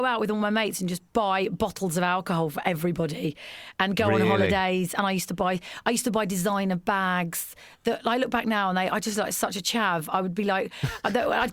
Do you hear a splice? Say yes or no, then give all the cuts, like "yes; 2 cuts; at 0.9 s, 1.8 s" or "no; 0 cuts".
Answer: no; 0 cuts